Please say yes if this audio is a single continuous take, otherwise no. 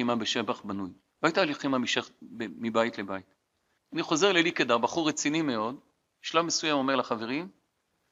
no